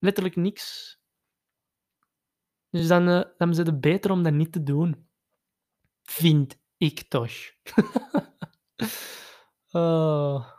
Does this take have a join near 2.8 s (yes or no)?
no